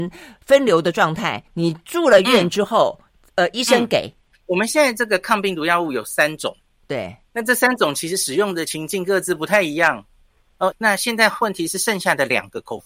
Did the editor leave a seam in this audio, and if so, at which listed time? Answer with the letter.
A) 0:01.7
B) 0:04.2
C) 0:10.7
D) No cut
C